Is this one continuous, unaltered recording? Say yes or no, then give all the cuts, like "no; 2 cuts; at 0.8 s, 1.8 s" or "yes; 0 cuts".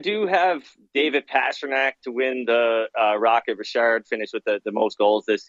yes; 0 cuts